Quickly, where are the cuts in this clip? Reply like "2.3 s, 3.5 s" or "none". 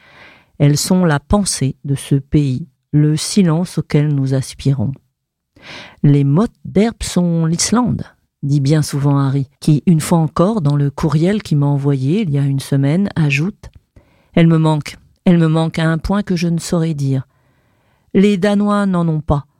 9.6 s

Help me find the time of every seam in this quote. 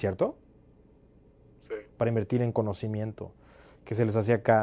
1.9 s

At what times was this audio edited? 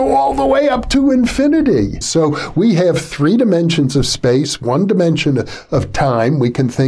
2.0 s

